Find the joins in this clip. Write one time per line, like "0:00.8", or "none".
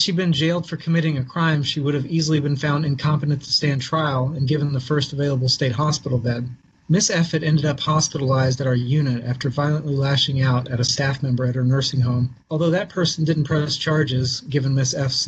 0:06.7
0:12.4